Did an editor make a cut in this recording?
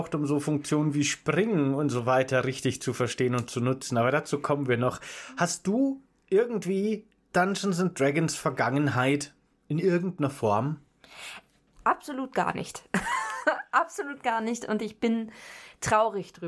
no; 0 cuts

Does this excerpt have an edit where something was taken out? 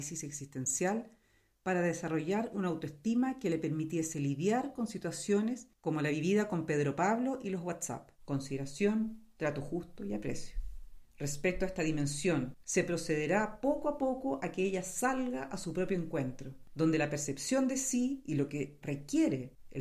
yes; 2 cuts; at 8.1 s, 12.6 s

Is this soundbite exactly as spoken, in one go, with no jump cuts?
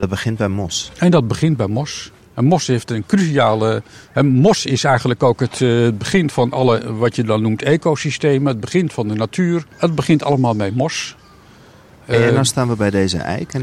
no; 1 cut; at 9.7 s

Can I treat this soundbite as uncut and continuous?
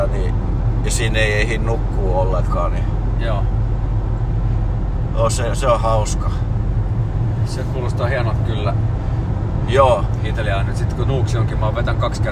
no; 1 cut; at 9.7 s

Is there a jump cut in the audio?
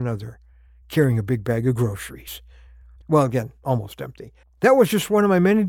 yes; 2 cuts; at 3.0 s, 4.4 s

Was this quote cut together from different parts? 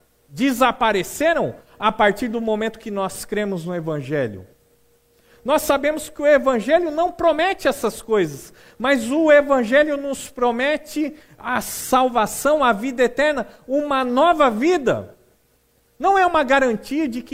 yes; 1 cut; at 15.8 s

